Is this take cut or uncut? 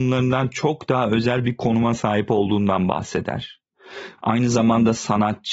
cut